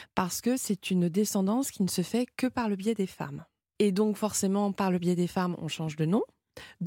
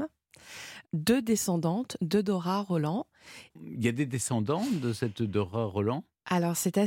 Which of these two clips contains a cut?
second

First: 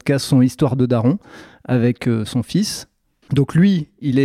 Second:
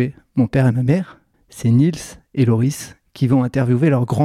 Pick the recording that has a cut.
first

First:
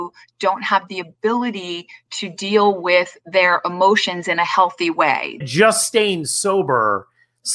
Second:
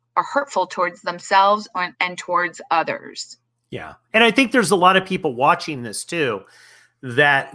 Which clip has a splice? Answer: first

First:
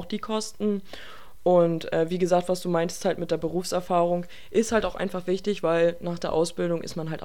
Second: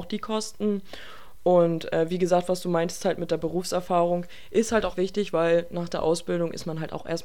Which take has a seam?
second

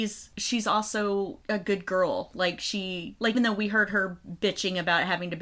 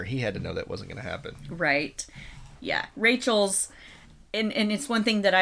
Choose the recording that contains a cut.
first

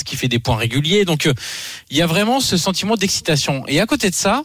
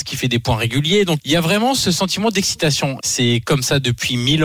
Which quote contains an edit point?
second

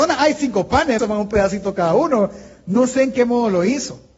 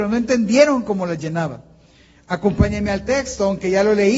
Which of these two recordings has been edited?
first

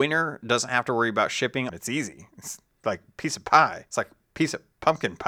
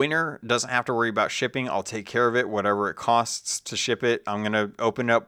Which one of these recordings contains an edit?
first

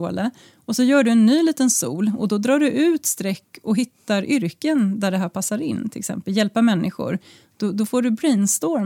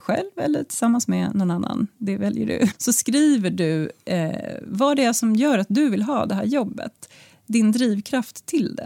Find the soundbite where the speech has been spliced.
second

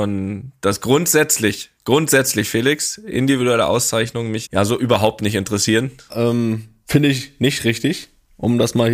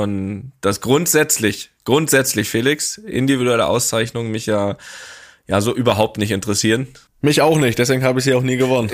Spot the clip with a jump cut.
first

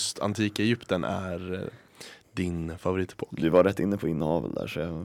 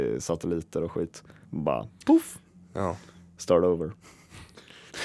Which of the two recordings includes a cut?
second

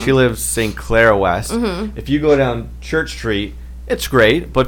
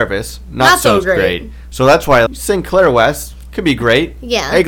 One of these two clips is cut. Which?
second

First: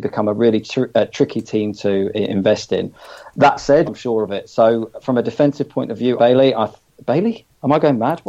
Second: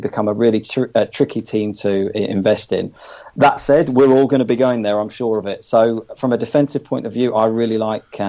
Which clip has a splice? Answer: first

